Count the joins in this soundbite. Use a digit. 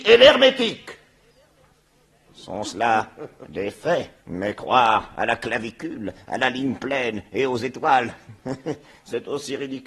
2